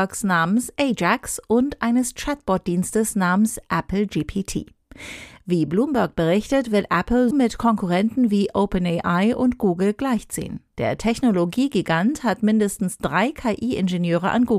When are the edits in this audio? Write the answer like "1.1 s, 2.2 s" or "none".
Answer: 7.3 s, 10.7 s